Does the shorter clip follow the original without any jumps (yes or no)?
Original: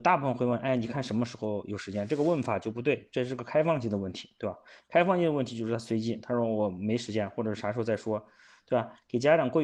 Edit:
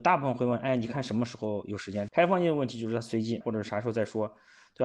no